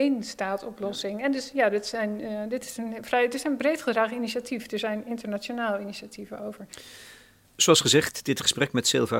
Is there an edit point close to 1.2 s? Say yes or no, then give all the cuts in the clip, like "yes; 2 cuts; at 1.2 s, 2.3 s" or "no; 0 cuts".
no; 0 cuts